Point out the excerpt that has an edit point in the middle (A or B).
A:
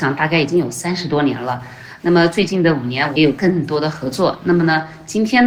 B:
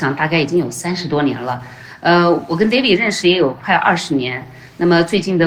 A